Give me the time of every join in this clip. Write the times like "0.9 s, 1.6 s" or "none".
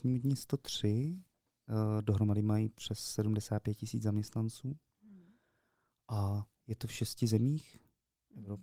none